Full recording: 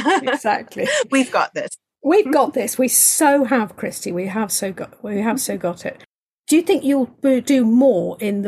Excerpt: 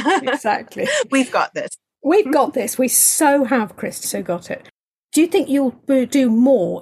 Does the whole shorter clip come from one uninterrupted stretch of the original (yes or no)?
no